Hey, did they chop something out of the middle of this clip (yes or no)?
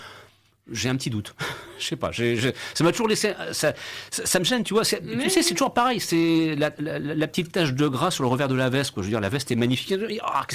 no